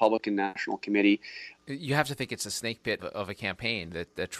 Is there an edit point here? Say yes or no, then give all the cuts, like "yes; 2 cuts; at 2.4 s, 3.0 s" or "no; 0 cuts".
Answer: yes; 2 cuts; at 1.6 s, 3.0 s